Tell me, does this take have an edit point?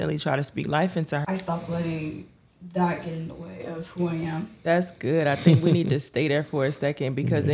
yes; 1 cut; at 1.2 s

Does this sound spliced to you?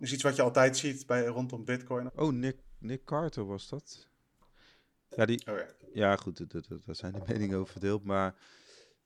yes; 1 cut; at 2.1 s

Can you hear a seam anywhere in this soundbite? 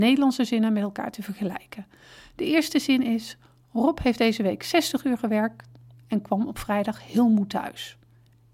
no; 0 cuts

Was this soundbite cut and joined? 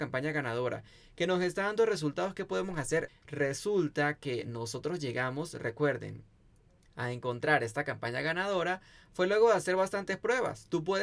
yes; 1 cut; at 3.1 s

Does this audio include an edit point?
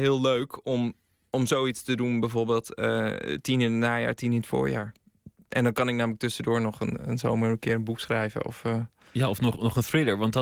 no; 0 cuts

